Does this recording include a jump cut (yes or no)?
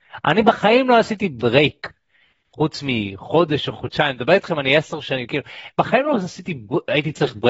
no